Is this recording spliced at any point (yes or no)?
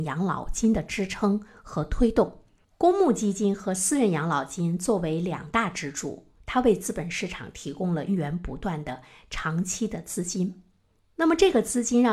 yes